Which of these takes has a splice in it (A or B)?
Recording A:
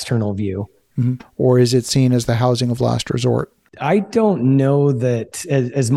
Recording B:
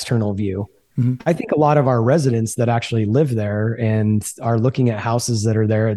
A